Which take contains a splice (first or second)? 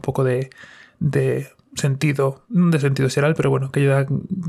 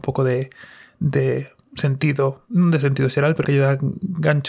second